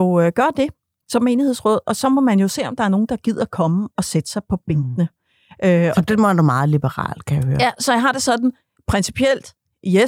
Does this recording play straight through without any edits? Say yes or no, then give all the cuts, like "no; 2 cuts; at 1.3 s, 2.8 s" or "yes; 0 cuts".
yes; 0 cuts